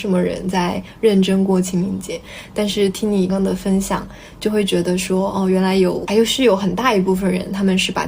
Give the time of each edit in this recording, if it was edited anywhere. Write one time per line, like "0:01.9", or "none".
0:03.3